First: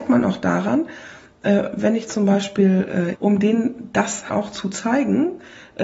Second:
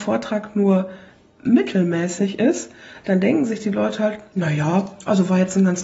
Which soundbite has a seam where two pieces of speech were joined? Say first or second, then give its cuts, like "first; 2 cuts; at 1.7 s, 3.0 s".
first; 2 cuts; at 3.1 s, 4.3 s